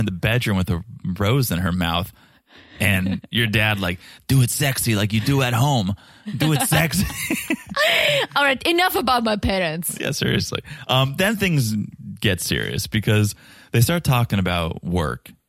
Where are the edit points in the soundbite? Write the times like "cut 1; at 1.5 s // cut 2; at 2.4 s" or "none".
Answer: none